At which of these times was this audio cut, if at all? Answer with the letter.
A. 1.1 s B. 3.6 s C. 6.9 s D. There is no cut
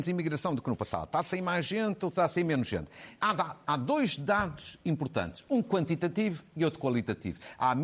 D